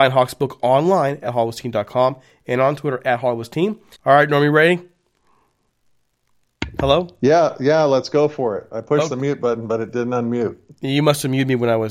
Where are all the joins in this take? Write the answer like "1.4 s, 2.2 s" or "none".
4.0 s

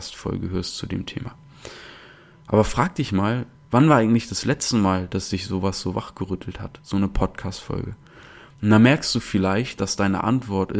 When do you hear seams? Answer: none

